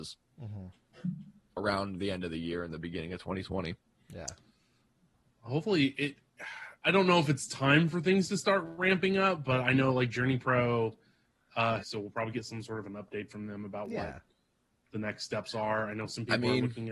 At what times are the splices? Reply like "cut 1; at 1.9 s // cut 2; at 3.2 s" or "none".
cut 1; at 6.8 s // cut 2; at 11.8 s